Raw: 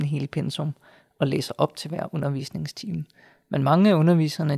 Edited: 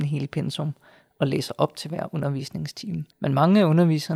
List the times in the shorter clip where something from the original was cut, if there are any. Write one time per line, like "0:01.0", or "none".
0:03.1